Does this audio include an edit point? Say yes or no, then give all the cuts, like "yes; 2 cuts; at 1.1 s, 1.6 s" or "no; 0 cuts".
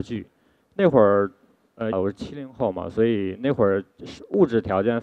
yes; 1 cut; at 1.9 s